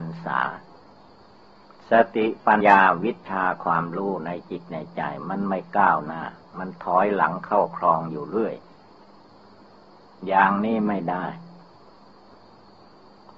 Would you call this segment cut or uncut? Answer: cut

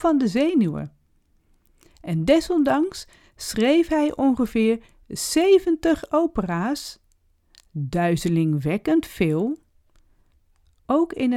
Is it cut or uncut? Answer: uncut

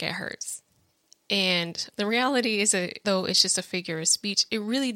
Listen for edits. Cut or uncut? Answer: cut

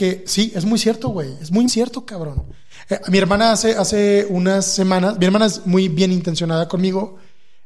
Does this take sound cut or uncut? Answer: cut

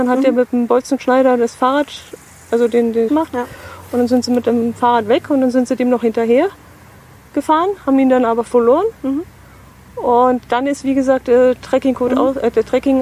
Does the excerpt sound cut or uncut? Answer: cut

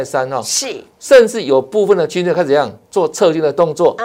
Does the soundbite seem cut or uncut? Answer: cut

